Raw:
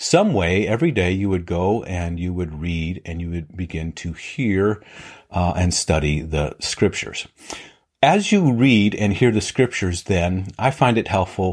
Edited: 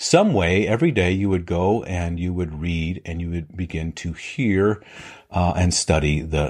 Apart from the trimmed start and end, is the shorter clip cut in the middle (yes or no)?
no